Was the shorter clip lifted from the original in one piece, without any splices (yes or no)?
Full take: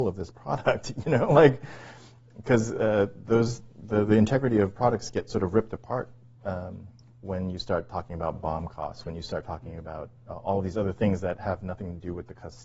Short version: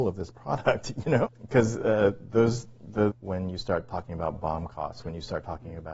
no